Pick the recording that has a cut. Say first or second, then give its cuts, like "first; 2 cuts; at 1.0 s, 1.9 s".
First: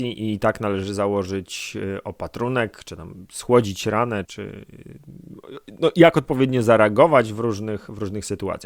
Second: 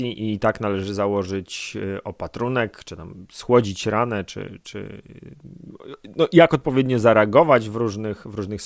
first; 1 cut; at 4.3 s